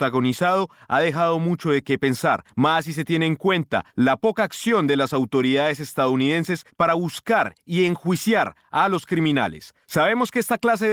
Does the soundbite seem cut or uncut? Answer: uncut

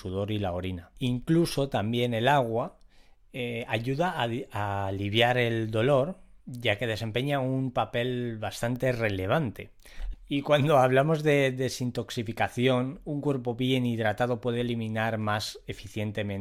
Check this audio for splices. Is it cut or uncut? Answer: cut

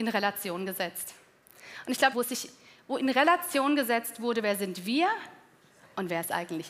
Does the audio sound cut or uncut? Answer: cut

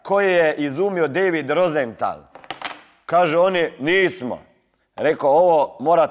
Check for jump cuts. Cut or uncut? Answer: uncut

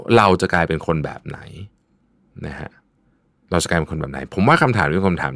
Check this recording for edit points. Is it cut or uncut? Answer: uncut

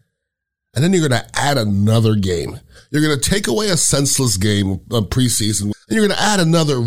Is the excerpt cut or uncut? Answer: cut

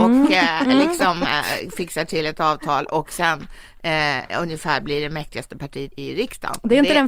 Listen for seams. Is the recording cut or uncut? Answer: cut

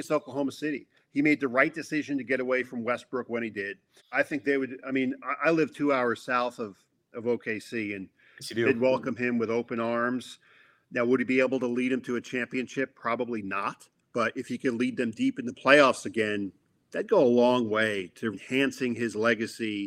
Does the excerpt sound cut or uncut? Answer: cut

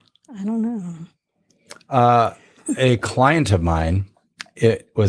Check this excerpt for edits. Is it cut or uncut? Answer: uncut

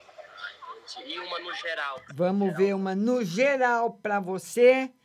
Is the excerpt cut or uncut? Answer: cut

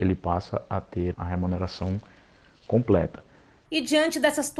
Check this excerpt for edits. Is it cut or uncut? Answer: cut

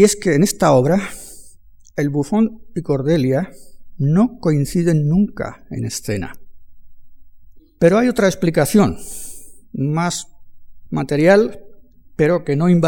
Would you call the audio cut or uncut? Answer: cut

